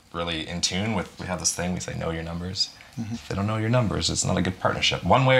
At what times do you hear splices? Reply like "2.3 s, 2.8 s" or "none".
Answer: 1.2 s, 3.1 s

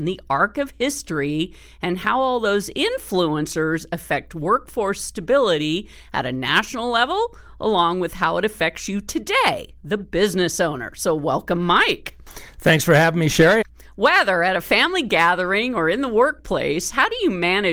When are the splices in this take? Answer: 13.6 s

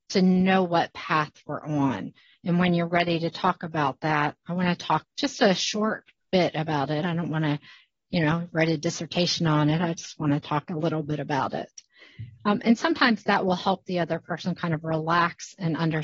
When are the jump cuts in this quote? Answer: none

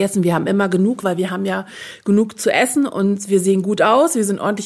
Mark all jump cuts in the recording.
1.0 s

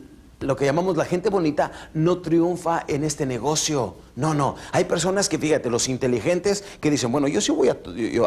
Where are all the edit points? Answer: none

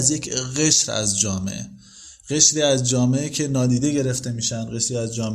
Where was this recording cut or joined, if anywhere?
none

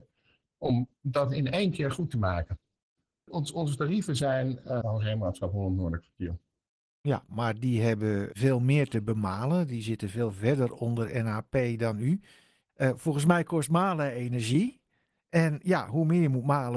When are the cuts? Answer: 4.8 s

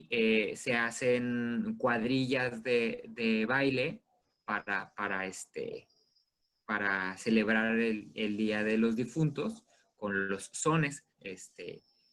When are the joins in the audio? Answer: 10.0 s, 11.2 s

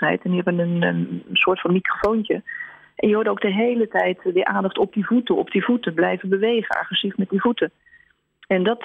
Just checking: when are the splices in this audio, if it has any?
none

